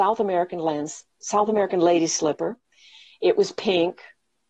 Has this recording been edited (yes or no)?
yes